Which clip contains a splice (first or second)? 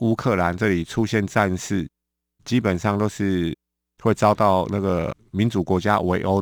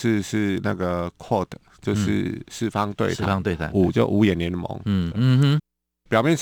second